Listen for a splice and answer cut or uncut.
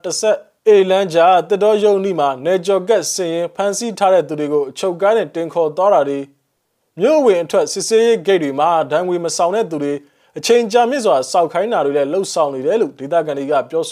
uncut